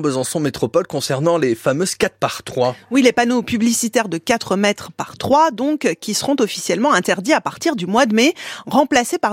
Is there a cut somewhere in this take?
no; 0 cuts

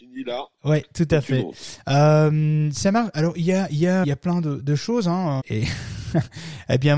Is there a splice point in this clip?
yes; 2 cuts; at 4.0 s, 5.4 s

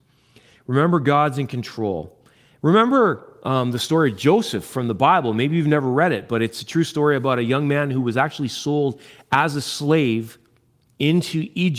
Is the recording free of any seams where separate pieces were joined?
yes; 0 cuts

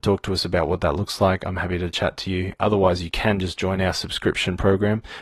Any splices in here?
no; 0 cuts

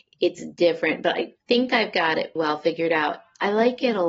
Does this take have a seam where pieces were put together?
yes; 1 cut; at 2.4 s

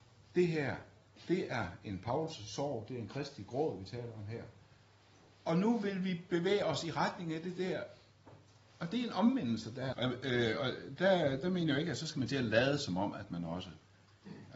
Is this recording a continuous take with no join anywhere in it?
no; 1 cut; at 9.9 s

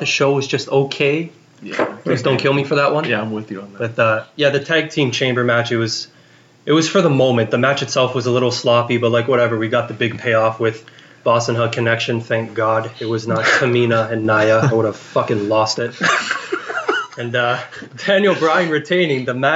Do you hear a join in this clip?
no; 0 cuts

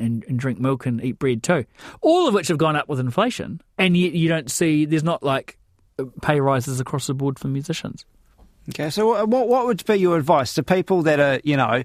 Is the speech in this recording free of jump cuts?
yes; 0 cuts

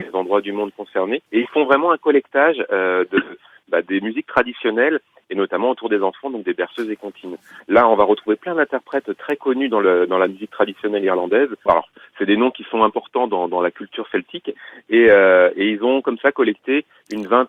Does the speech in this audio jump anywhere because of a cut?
yes; 3 cuts; at 1.3 s, 7.6 s, 11.7 s

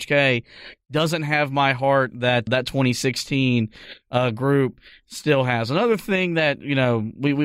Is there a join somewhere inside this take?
yes; 1 cut; at 2.5 s

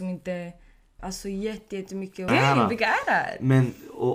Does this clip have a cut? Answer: yes; 2 cuts; at 1.0 s, 2.3 s

